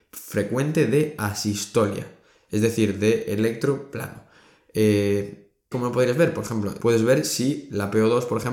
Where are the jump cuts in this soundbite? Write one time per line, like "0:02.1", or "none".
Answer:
0:05.7
0:06.8